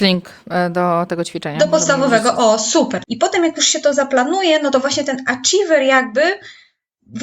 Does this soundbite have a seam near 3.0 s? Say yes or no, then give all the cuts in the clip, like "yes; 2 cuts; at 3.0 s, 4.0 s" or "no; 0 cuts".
yes; 1 cut; at 3.0 s